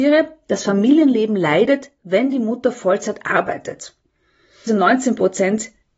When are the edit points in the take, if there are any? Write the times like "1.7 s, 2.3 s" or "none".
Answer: 4.7 s